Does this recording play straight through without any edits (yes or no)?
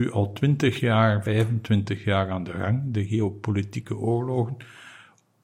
yes